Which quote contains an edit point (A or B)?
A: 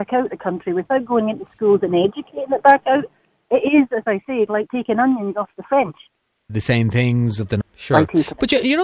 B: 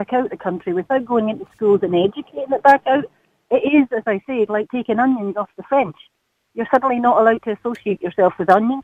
A